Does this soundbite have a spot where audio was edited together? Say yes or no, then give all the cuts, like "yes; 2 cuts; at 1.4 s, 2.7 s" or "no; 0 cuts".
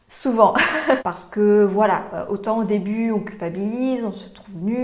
yes; 1 cut; at 1.0 s